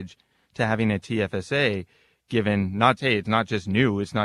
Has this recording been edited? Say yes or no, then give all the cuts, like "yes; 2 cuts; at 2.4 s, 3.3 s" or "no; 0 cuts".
yes; 1 cut; at 3.0 s